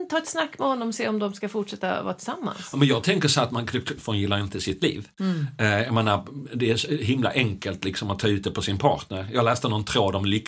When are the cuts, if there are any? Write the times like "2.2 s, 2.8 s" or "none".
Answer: 4.0 s

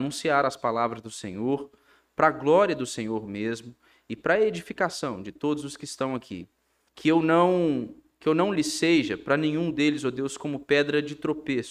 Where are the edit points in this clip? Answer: 6.9 s

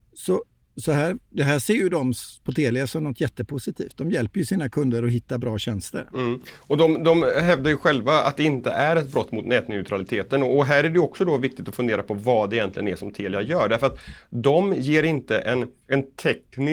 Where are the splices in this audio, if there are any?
15.8 s

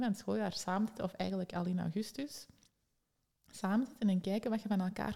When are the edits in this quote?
none

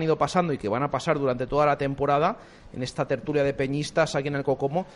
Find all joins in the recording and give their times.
none

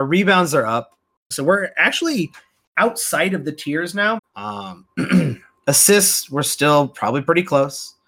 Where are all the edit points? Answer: 1.3 s, 4.2 s

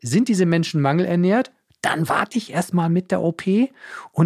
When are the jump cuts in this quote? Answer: none

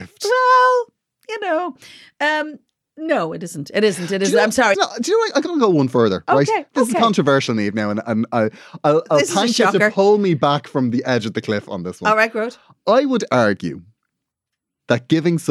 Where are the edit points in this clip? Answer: 4.7 s

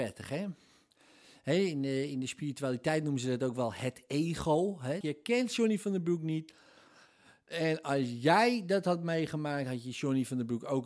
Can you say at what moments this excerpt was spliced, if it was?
5.0 s

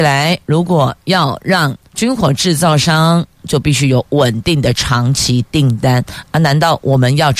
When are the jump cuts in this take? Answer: 1.9 s, 3.4 s

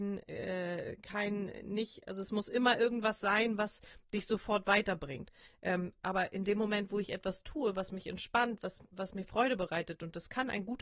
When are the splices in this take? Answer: none

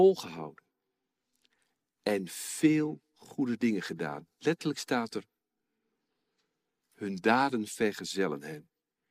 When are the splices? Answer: none

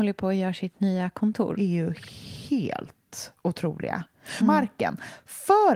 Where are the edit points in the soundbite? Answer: 1.6 s, 4.4 s

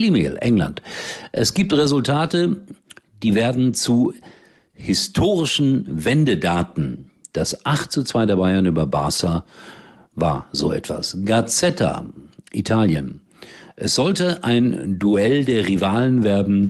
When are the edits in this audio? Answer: none

